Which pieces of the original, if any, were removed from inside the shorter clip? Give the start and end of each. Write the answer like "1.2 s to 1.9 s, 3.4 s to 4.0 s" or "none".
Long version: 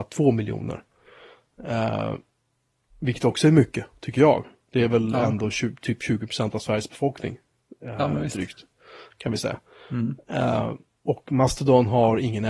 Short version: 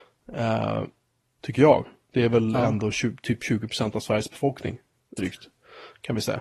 2.7 s to 4.0 s, 7.8 s to 8.3 s

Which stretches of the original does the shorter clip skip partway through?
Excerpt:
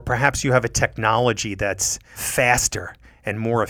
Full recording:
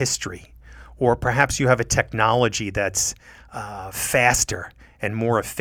3.3 s to 3.9 s

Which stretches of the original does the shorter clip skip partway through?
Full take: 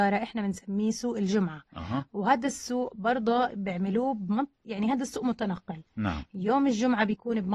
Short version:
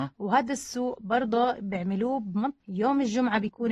4.5 s to 6.3 s

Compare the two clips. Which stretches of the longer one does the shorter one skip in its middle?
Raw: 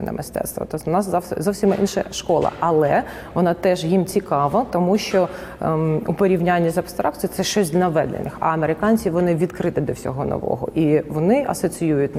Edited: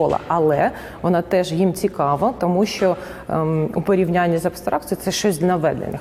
none

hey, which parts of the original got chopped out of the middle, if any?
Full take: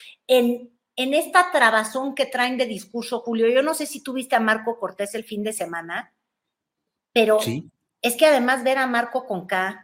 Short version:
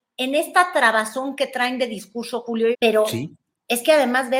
3.5 s to 7.1 s

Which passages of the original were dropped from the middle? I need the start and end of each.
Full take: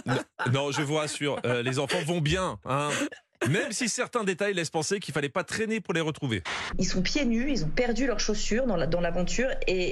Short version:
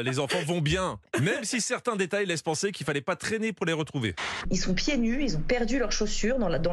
2.6 s to 3.3 s

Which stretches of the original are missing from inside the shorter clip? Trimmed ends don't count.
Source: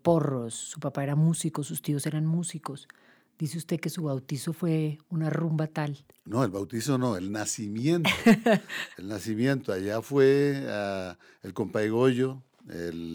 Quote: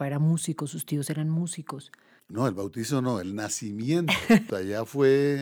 3.2 s to 6.2 s, 8.5 s to 9.7 s

